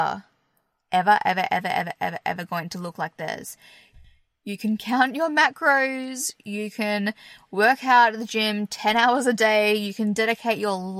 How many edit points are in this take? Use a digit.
1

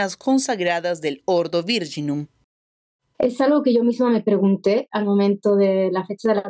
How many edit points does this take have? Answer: 1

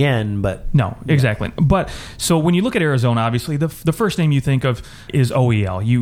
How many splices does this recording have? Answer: 1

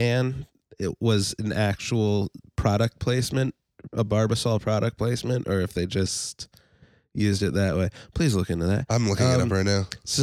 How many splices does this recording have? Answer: 0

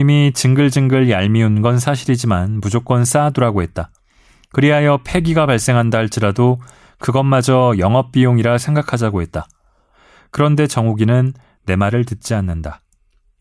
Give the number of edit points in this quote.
0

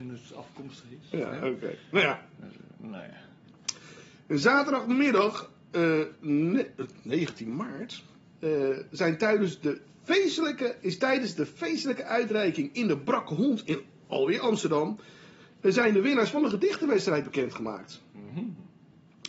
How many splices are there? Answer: 0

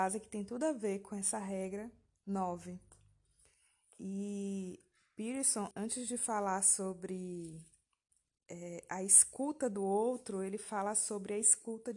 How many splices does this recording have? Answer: 1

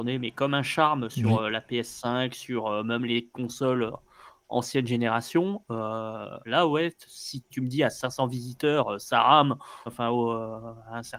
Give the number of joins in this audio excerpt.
2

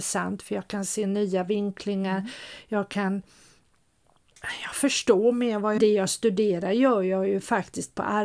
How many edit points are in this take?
1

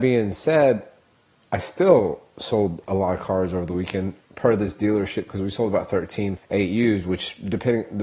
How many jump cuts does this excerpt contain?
1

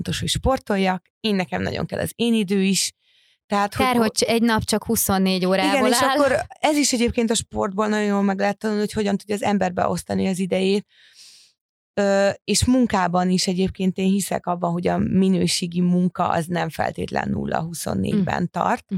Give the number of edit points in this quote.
0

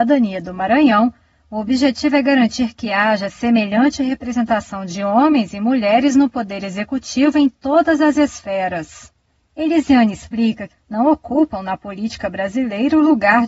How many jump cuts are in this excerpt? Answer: 1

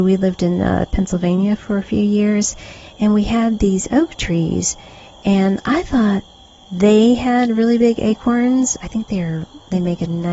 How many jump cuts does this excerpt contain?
1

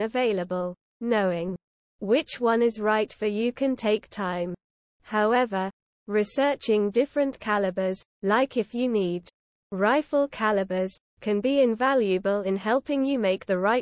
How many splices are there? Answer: 0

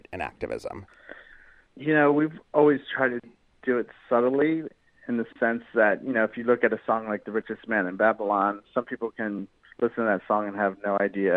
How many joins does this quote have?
0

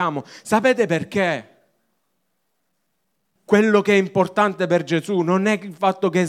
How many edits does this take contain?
1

